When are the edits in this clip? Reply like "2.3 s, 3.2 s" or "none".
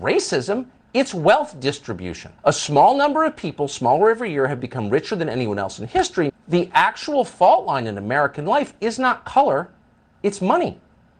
2.4 s, 6.3 s